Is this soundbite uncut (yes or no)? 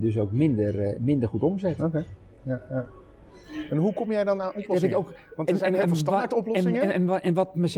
yes